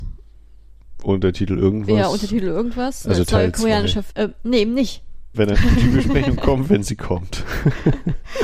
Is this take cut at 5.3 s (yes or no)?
yes